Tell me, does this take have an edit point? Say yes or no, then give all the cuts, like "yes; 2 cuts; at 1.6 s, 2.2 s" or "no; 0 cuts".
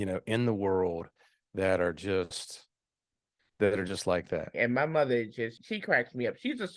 yes; 2 cuts; at 4.5 s, 5.6 s